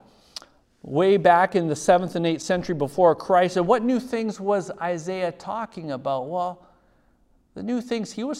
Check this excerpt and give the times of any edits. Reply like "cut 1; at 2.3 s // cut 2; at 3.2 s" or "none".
none